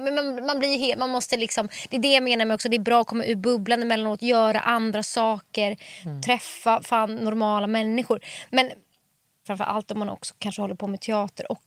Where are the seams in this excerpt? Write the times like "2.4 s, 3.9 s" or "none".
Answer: 9.5 s